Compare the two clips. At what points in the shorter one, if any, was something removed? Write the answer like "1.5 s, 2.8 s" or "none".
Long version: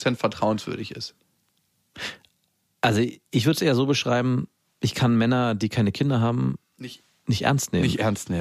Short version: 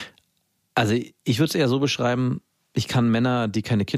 none